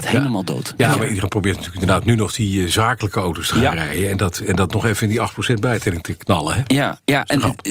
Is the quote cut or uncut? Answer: uncut